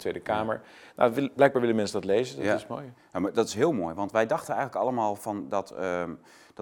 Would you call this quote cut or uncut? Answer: uncut